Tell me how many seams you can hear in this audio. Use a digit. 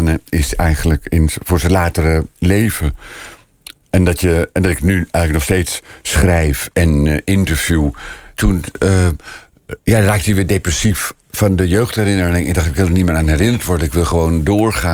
1